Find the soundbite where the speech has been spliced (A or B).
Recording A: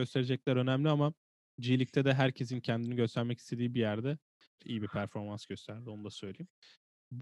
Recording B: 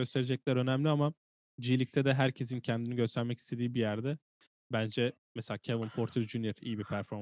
A